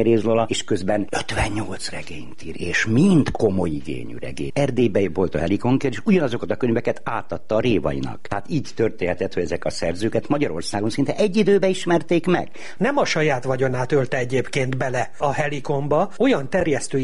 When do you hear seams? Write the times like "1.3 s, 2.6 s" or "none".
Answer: 4.5 s, 12.8 s